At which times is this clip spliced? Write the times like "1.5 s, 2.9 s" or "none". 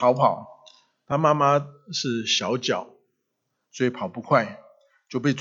none